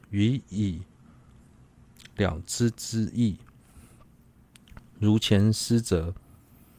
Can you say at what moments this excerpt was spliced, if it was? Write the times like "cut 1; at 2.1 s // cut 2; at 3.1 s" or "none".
none